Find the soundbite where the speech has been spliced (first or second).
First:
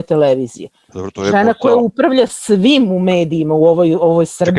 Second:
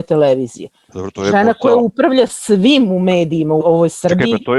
second